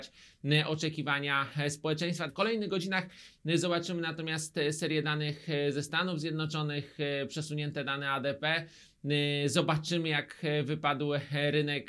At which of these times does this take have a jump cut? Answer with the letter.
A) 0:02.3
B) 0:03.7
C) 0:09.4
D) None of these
A